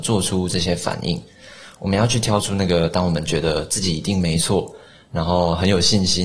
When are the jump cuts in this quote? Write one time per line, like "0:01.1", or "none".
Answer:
none